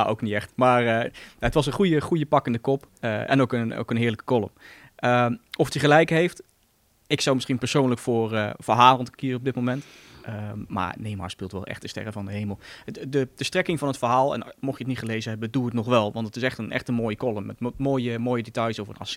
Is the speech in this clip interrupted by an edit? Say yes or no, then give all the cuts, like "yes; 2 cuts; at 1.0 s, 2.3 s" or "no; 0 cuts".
no; 0 cuts